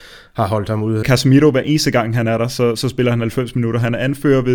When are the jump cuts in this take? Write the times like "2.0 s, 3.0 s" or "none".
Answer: 1.0 s